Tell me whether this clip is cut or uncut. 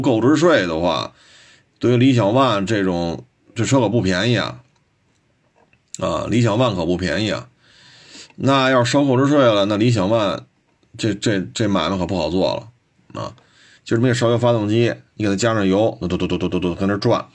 cut